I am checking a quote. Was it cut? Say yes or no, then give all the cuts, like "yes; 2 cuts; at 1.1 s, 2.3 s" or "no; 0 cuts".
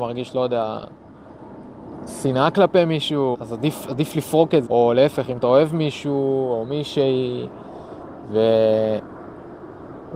yes; 2 cuts; at 3.3 s, 4.7 s